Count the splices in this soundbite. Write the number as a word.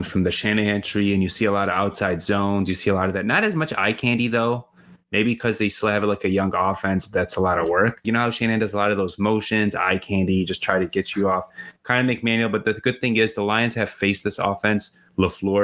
one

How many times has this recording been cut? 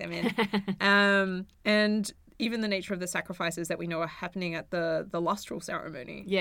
one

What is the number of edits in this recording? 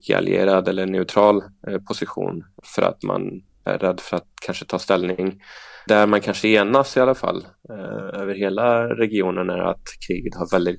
one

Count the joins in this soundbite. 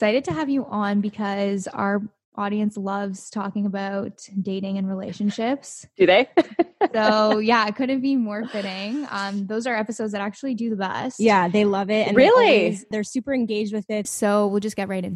two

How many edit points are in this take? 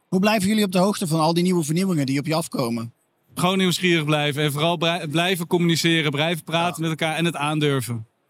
one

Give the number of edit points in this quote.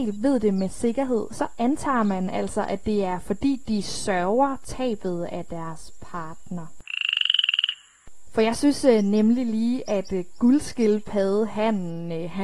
one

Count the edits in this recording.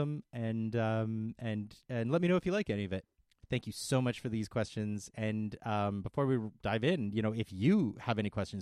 one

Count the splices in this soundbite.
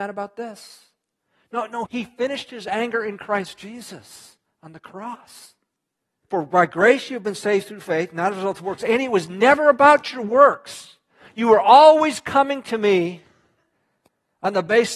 two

